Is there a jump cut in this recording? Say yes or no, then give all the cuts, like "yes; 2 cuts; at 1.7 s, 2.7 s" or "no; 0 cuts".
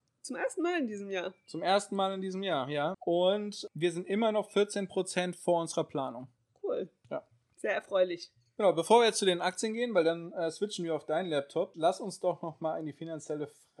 yes; 1 cut; at 2.9 s